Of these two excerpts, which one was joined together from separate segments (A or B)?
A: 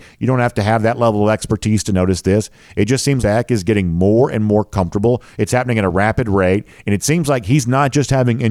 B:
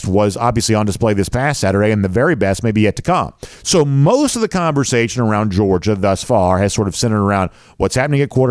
A